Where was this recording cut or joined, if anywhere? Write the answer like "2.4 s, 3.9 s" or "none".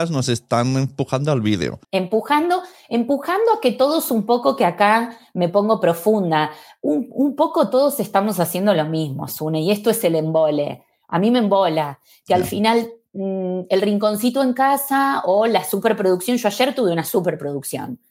1.8 s